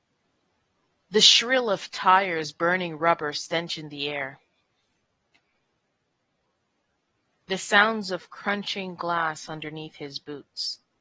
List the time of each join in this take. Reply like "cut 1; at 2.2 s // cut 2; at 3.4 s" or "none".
none